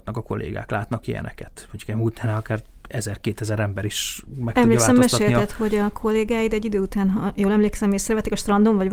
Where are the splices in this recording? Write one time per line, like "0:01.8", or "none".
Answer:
none